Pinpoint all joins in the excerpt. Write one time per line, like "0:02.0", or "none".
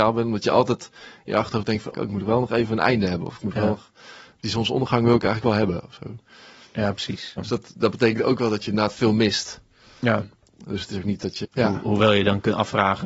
0:01.9
0:07.4
0:11.4